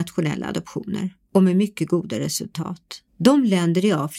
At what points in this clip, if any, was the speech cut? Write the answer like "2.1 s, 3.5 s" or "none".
3.1 s